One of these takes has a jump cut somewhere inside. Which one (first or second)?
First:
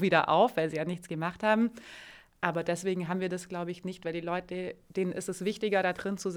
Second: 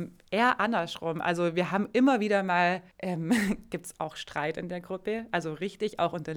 second